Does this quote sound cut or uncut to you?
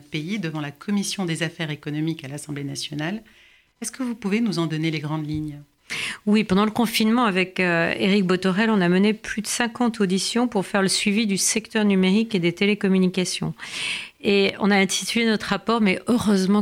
uncut